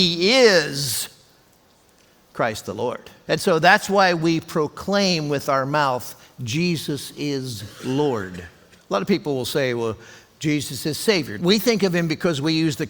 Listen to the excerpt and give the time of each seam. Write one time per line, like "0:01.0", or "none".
0:03.3
0:08.8
0:11.4